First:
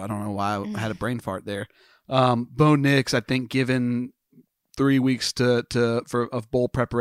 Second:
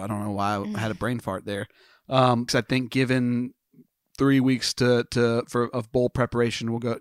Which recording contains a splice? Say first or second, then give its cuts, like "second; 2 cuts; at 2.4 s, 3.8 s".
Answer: second; 1 cut; at 2.5 s